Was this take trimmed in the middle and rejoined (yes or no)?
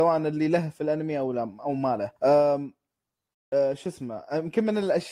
yes